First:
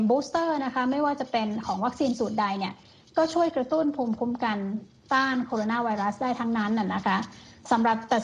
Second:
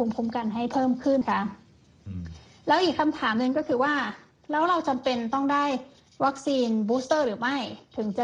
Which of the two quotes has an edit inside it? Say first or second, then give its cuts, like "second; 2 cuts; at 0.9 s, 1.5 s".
second; 1 cut; at 1.2 s